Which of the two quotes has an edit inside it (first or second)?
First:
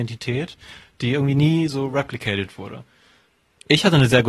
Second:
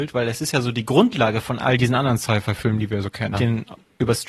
second